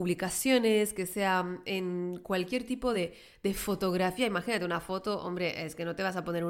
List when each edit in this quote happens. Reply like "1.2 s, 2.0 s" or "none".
none

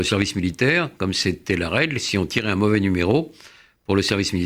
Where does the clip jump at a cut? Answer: none

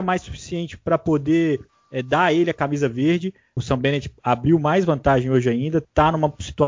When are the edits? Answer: none

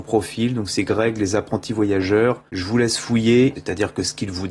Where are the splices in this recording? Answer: 2.5 s, 3.5 s

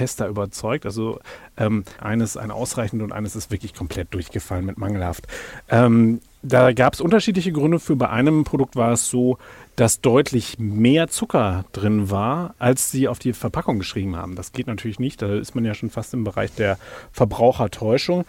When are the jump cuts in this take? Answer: 2.0 s

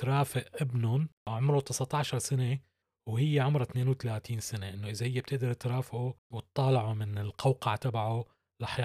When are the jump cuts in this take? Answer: 1.2 s, 6.2 s

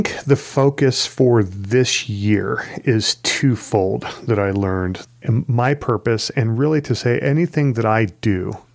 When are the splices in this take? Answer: 5.1 s

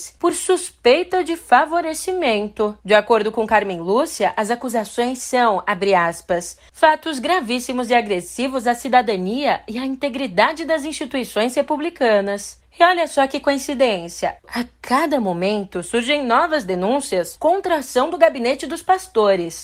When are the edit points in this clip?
2.8 s, 12.6 s

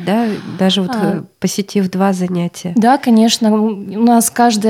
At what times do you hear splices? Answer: none

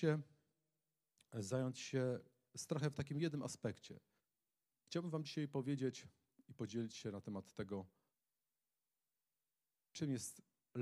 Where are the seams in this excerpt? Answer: 4.7 s

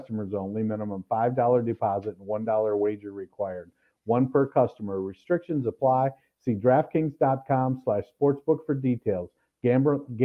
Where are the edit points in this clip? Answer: none

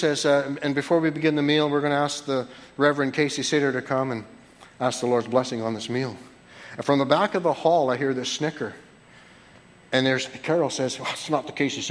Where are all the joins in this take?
none

